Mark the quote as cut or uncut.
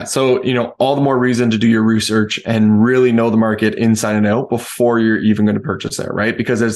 uncut